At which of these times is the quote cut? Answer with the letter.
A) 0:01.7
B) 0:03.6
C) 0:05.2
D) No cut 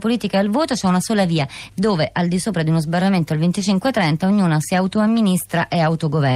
A